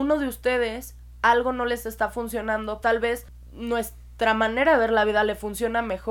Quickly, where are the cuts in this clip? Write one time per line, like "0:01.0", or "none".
0:02.8